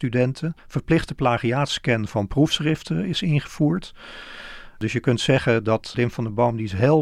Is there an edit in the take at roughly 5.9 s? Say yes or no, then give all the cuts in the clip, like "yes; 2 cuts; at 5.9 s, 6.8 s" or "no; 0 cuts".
yes; 1 cut; at 5.9 s